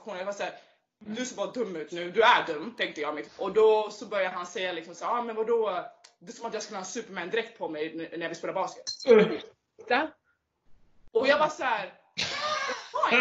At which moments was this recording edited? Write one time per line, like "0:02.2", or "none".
0:01.9
0:03.3